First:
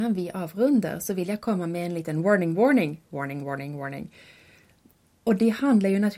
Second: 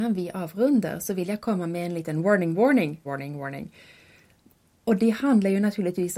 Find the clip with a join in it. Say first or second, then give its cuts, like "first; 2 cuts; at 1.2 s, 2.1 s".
second; 1 cut; at 3.1 s